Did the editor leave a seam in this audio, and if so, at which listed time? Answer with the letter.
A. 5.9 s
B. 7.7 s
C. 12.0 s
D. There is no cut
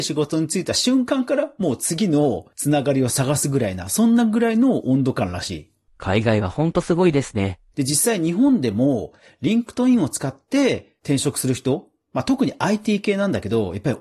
B